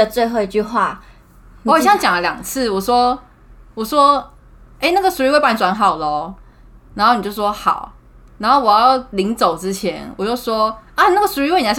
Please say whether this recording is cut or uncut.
uncut